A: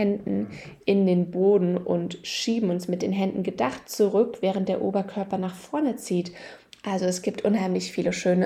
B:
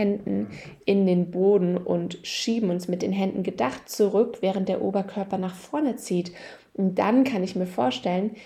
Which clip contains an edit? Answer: A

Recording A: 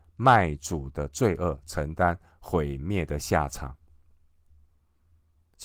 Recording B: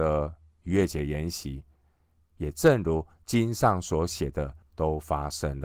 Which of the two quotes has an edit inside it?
B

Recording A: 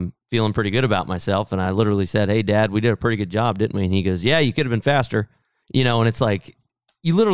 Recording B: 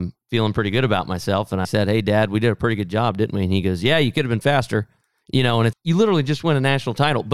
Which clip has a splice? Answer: B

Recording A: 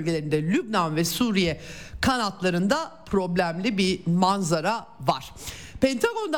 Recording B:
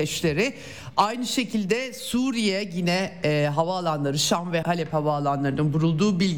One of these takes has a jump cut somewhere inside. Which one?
B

